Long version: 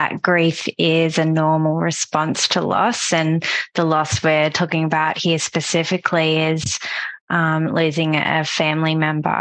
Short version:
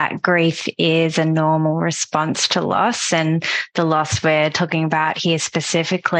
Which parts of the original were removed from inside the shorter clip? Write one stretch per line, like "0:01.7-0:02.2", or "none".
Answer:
none